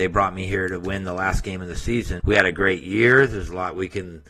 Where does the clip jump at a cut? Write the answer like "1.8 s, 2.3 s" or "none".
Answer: 2.2 s